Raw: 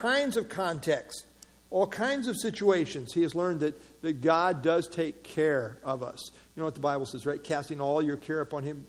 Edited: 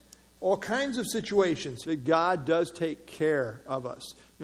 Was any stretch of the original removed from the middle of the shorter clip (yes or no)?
yes